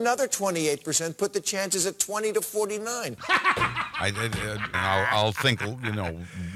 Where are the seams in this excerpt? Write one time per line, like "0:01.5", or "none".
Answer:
0:03.2
0:04.7